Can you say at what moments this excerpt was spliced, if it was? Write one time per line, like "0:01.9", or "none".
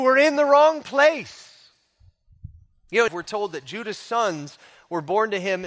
0:03.1